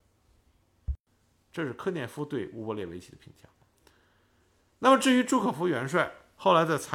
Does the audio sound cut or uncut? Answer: cut